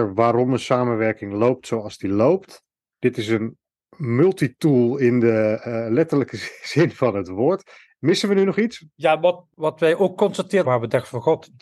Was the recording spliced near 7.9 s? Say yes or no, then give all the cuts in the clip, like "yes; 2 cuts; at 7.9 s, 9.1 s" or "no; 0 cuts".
no; 1 cut; at 10.6 s